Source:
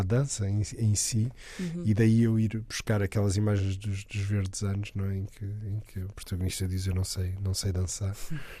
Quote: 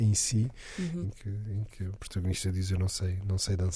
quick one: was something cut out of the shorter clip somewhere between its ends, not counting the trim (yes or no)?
yes